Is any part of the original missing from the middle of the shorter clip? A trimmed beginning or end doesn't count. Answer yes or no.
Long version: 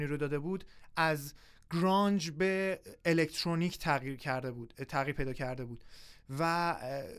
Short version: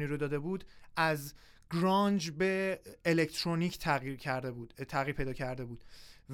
no